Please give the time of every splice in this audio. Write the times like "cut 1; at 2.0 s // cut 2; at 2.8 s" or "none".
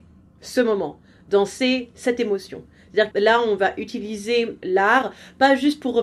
cut 1; at 3.1 s